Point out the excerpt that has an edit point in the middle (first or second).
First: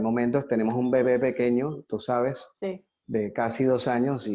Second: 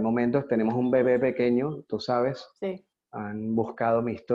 second